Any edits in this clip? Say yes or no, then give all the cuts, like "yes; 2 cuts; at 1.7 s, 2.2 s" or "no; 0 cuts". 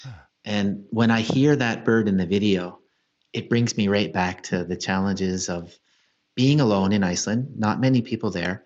no; 0 cuts